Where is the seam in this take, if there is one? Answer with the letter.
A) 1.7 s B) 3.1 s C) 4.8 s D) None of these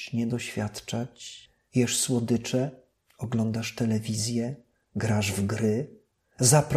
A